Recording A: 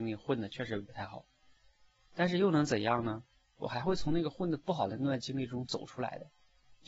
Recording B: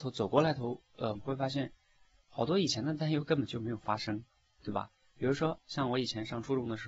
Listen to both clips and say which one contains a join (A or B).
B